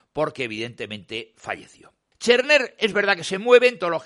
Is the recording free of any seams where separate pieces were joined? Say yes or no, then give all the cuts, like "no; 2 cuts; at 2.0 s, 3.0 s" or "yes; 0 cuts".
no; 1 cut; at 2.1 s